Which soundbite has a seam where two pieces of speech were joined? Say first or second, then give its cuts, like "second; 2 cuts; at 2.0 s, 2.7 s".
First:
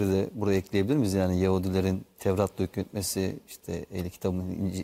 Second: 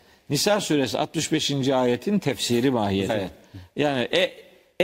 second; 1 cut; at 3.1 s